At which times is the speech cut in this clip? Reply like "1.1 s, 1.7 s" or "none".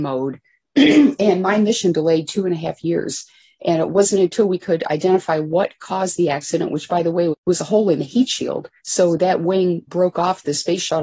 7.3 s, 8.8 s, 9.9 s